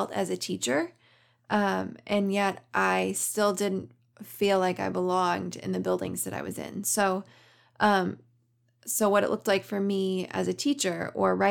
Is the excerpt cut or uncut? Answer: uncut